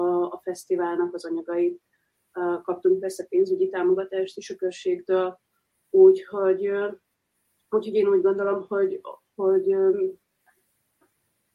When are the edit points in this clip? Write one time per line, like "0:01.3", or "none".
none